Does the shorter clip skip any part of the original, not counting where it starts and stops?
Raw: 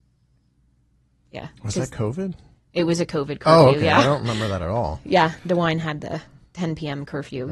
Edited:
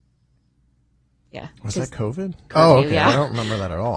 yes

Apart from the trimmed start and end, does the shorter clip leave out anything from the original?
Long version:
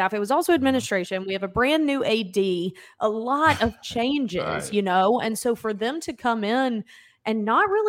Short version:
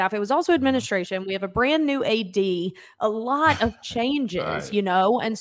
no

